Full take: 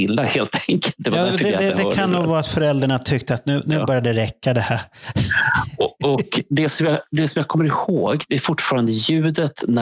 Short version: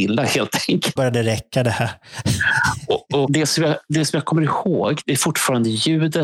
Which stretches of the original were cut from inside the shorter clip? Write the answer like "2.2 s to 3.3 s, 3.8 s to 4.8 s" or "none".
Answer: 1.0 s to 3.9 s, 6.1 s to 6.5 s